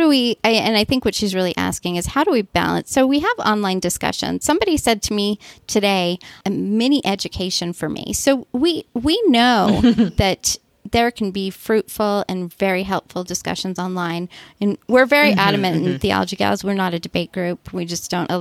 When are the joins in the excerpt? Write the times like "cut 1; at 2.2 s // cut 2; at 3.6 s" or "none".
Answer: cut 1; at 6.4 s